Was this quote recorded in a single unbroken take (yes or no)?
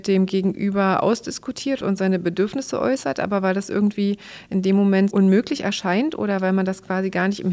no